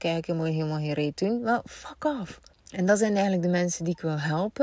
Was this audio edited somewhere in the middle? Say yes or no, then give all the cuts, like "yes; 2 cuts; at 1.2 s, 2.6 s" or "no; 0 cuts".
yes; 1 cut; at 2.5 s